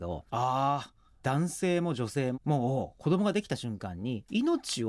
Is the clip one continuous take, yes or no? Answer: no